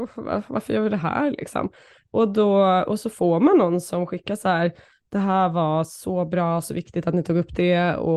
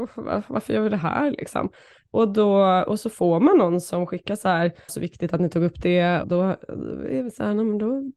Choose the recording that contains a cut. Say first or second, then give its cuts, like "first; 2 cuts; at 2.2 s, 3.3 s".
second; 2 cuts; at 4.9 s, 6.2 s